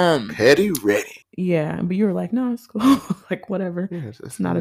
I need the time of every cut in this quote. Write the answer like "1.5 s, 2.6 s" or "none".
1.2 s